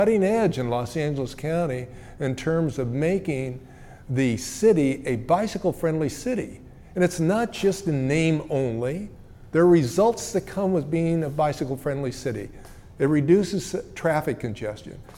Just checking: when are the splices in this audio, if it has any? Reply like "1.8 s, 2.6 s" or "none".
none